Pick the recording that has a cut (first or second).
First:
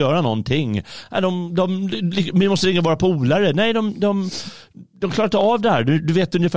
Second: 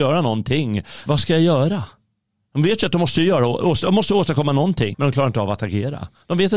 second